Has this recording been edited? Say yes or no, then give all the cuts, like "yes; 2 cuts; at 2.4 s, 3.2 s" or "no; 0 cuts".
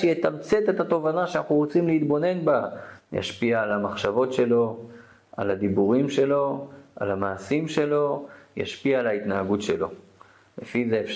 yes; 1 cut; at 3.0 s